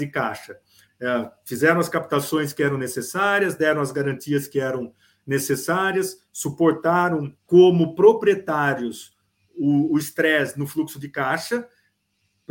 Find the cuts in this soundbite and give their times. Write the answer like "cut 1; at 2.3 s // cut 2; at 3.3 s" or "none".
cut 1; at 7.4 s